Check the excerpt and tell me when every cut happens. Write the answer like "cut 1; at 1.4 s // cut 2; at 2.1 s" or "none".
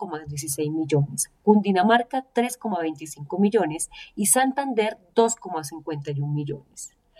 none